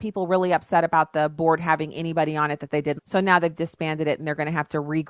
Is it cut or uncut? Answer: cut